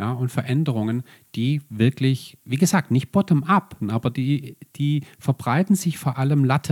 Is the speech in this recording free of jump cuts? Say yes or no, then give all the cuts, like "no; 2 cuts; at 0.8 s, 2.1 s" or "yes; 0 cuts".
no; 1 cut; at 3.8 s